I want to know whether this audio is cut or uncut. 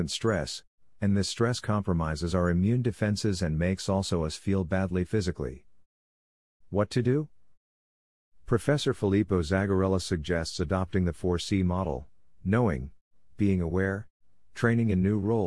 cut